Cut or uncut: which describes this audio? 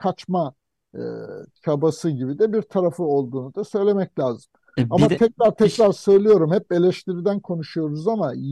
uncut